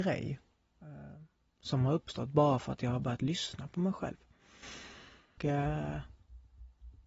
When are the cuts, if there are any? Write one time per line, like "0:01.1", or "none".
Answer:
0:05.4